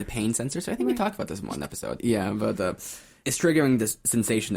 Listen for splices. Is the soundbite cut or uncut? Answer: cut